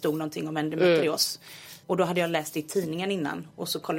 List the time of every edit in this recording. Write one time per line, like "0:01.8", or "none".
0:01.8